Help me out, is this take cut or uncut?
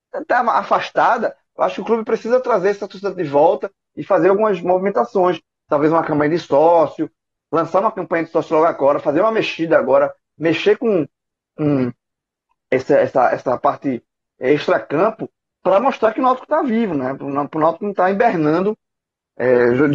uncut